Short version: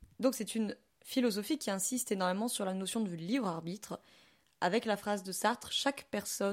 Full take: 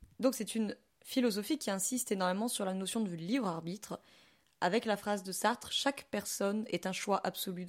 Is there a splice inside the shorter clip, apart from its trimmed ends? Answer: no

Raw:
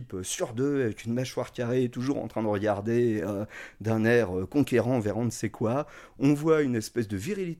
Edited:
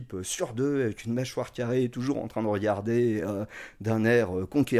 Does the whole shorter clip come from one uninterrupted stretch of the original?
yes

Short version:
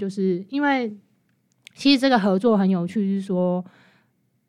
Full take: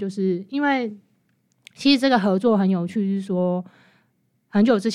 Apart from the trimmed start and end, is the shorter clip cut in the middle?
no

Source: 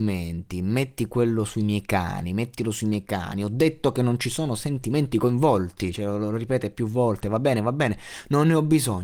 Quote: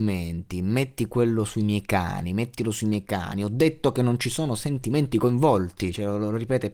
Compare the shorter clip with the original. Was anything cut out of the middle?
no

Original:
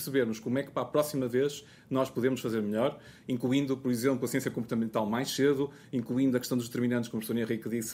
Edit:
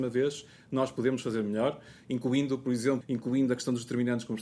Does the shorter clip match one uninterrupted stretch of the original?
no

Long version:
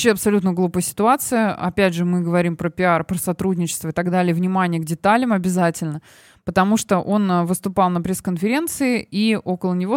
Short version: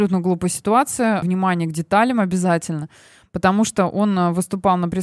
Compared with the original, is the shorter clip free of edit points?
no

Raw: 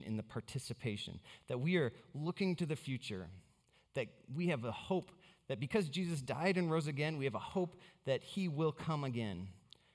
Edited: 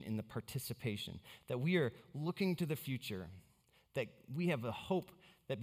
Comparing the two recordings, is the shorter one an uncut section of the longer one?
yes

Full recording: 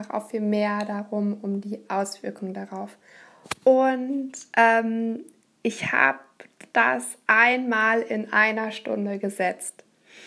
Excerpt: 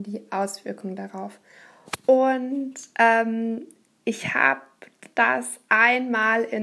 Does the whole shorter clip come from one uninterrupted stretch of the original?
yes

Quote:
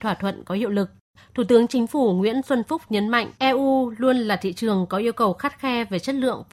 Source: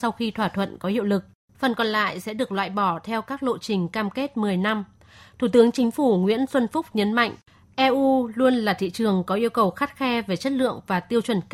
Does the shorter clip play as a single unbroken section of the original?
no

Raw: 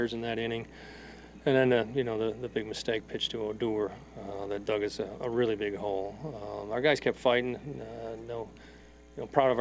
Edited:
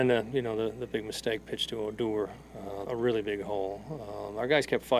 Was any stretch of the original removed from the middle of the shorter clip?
yes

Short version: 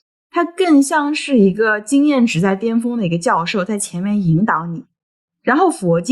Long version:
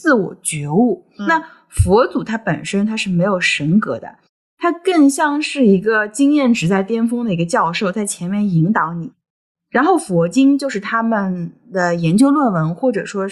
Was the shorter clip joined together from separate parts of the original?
no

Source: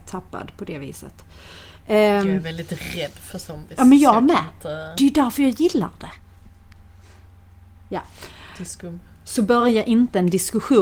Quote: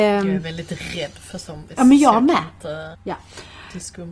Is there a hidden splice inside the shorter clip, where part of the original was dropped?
yes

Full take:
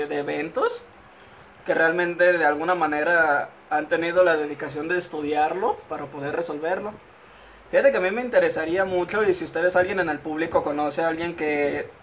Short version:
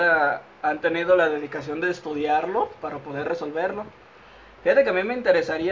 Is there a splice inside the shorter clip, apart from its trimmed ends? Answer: no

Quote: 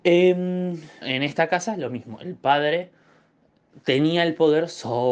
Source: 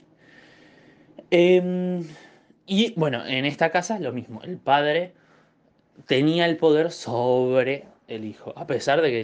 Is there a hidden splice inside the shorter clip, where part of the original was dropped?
yes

